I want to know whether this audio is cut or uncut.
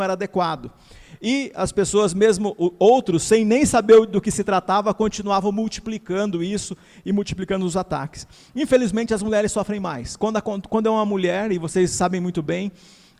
uncut